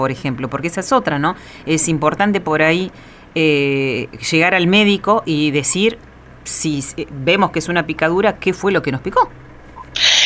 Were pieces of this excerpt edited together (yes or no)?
no